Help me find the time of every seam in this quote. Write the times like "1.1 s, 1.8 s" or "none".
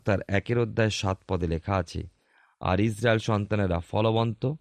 none